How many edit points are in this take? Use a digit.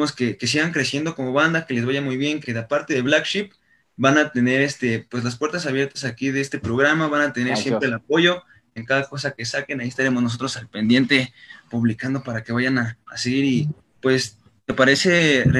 1